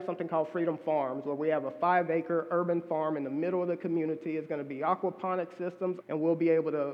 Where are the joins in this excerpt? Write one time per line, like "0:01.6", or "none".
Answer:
0:06.0